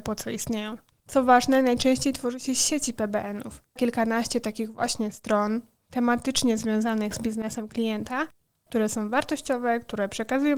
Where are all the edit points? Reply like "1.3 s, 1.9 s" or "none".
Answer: 1.0 s, 3.8 s, 8.7 s

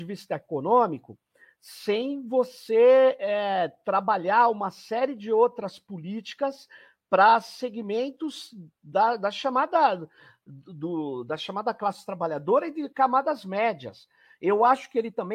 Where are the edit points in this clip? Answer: none

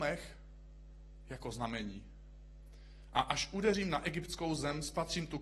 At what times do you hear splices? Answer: none

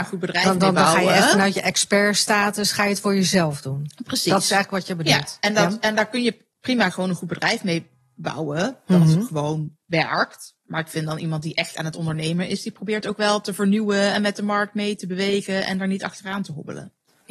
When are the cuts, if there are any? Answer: none

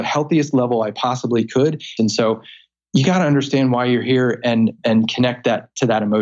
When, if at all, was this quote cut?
2.0 s

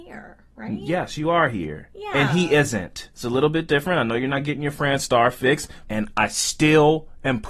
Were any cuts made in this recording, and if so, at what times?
3.1 s, 5.9 s

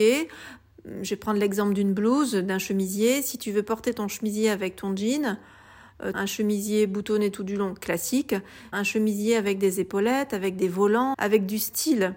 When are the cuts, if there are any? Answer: 6.1 s, 8.7 s, 11.1 s

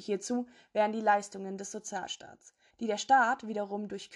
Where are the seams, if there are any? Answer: 2.7 s

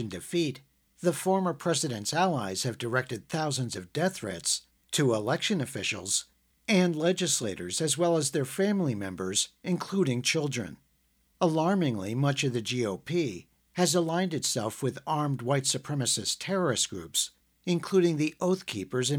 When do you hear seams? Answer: 11.3 s

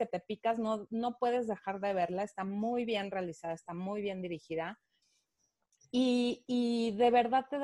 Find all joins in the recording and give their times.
none

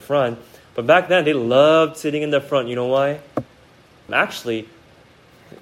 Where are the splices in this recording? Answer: 4.1 s

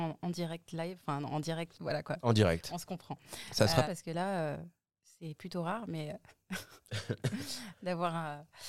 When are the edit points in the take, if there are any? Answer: 1.7 s, 3.8 s

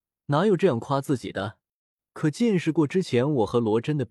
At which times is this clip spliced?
none

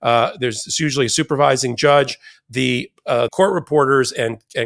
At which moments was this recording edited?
3.3 s

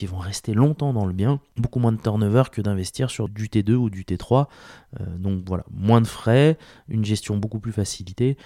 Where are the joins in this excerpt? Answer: none

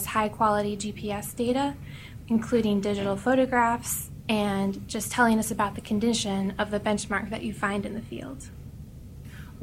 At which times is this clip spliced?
2.3 s

